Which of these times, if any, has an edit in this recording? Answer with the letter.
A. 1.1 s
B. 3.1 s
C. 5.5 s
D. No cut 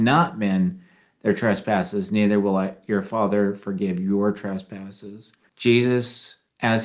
C